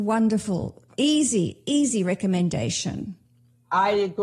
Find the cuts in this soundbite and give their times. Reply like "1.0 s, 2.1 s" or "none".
0.9 s